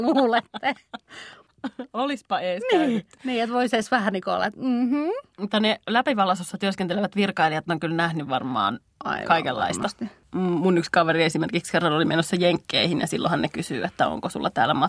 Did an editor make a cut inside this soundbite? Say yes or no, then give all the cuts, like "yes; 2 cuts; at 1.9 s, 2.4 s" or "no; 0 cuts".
no; 0 cuts